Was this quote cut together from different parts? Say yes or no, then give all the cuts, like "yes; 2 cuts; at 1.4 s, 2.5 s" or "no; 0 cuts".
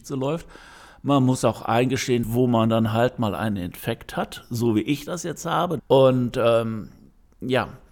yes; 2 cuts; at 2.2 s, 5.8 s